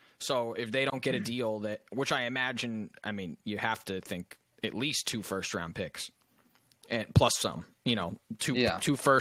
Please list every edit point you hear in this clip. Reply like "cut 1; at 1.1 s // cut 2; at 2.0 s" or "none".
none